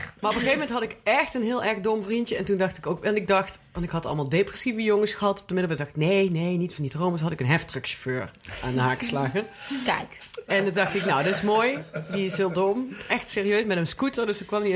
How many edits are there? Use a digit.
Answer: 0